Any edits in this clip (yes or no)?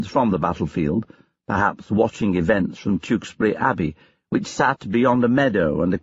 no